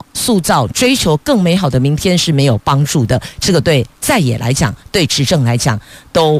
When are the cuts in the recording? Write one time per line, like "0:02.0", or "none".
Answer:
none